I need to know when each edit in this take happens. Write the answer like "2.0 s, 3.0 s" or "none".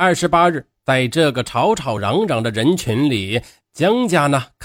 none